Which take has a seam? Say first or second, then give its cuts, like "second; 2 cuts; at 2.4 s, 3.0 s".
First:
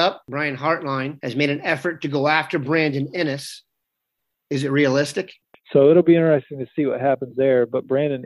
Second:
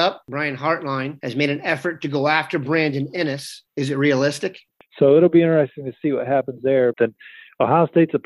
second; 2 cuts; at 3.7 s, 6.9 s